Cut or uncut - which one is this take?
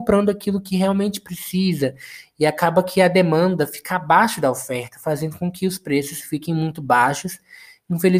uncut